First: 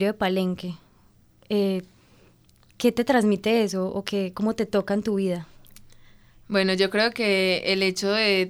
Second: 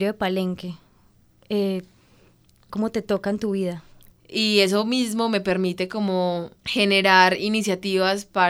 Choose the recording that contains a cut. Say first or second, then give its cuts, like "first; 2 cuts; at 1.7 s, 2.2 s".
second; 3 cuts; at 2.7 s, 4.1 s, 6.6 s